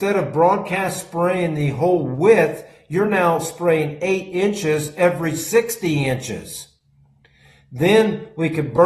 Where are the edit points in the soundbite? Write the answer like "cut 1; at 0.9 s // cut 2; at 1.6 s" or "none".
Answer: none

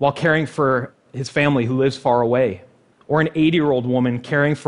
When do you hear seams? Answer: cut 1; at 2.9 s

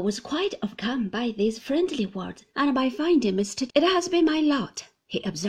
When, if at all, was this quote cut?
cut 1; at 2.5 s // cut 2; at 3.7 s

